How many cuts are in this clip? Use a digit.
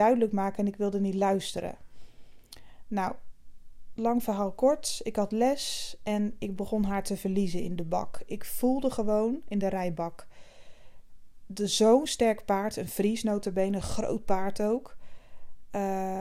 0